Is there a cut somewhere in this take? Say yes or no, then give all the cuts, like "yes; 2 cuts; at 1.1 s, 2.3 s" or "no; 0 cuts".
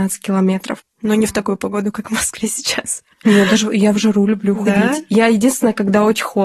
no; 0 cuts